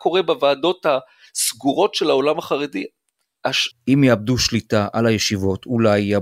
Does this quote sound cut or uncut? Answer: cut